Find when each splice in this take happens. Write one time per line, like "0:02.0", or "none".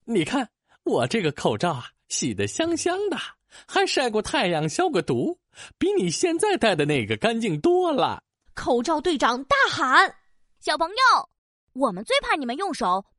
0:08.5